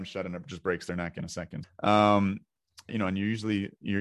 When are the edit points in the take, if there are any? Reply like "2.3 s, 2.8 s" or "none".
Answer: 1.6 s, 2.9 s